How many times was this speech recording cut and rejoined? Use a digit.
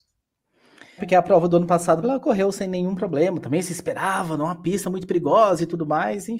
2